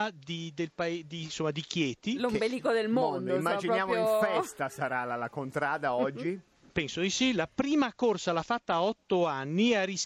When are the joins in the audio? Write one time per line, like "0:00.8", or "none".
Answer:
none